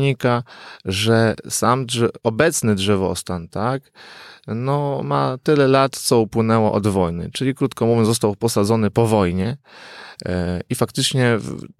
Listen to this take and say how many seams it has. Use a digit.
0